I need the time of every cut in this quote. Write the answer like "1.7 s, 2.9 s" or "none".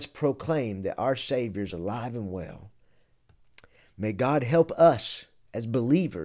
none